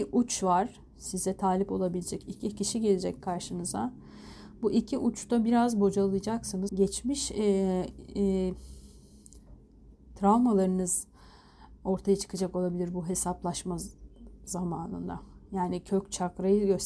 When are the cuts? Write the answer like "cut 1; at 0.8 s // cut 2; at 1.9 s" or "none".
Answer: cut 1; at 6.7 s

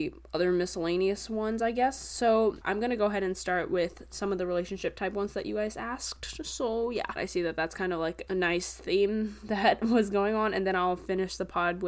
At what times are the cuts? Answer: cut 1; at 2.6 s // cut 2; at 7.2 s // cut 3; at 8.3 s

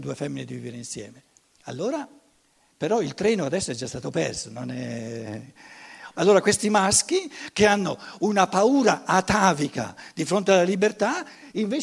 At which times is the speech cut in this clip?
cut 1; at 2.7 s // cut 2; at 6.1 s

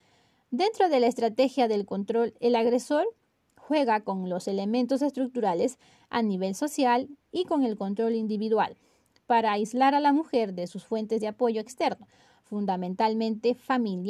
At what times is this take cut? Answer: none

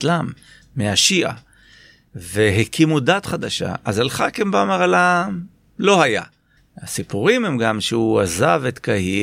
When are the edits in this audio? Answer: cut 1; at 6.6 s

